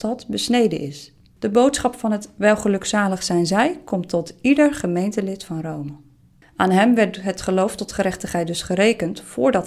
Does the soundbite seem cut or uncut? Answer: cut